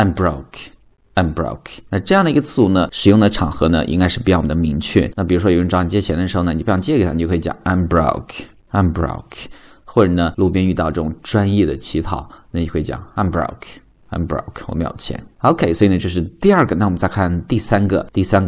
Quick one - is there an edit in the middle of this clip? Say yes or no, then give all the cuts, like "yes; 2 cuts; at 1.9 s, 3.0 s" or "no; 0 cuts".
yes; 1 cut; at 1.9 s